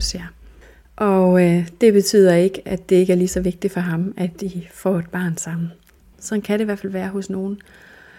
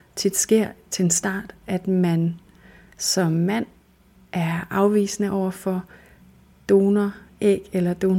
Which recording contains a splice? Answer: first; 1 cut; at 6.1 s

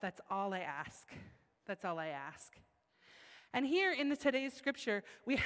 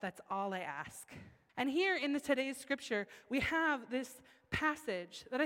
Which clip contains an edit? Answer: second; 1 cut; at 1.5 s

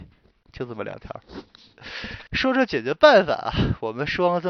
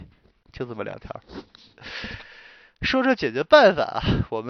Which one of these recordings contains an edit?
first; 1 cut; at 2.3 s

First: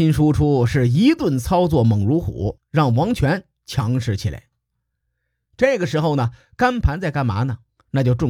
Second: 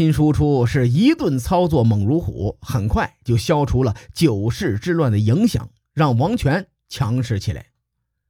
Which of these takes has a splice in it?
first; 1 cut; at 2.6 s

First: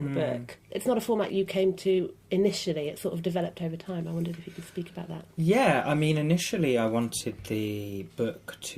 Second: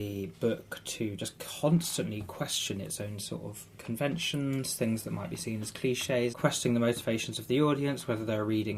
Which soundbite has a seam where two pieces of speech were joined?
second; 1 cut; at 6.3 s

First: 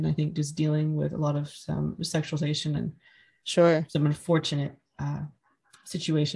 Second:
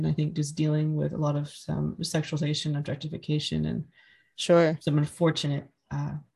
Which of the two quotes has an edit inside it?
first; 1 cut; at 2.7 s

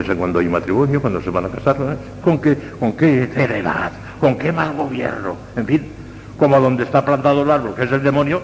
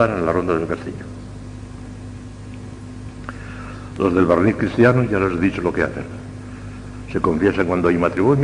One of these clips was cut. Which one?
first; 1 cut; at 2.2 s

